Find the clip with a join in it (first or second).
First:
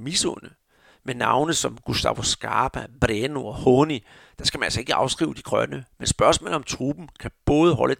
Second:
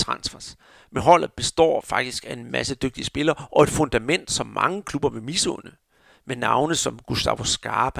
second